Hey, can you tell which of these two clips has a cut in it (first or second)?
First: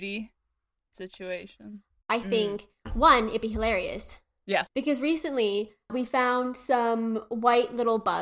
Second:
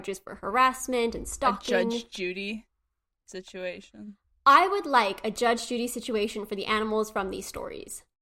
first